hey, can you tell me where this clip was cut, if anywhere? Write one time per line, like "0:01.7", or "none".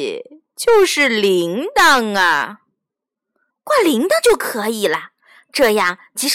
0:03.5